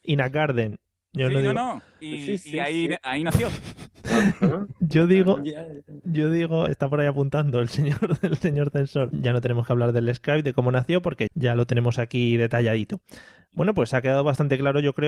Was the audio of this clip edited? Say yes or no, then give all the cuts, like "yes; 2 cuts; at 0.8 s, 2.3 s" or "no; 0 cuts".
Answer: yes; 3 cuts; at 6.7 s, 9.1 s, 11.3 s